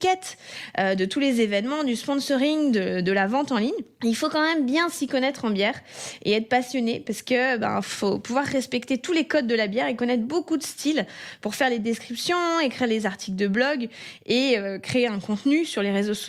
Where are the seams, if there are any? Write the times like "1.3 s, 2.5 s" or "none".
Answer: 7.8 s